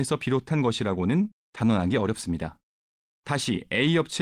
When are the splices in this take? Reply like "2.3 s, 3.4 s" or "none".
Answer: 3.0 s